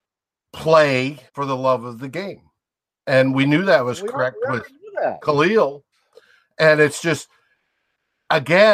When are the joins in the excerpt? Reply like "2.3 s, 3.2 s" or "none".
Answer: 1.3 s